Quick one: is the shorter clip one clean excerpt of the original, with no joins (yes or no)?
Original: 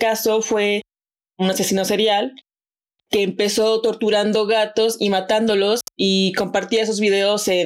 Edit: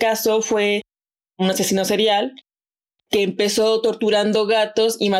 yes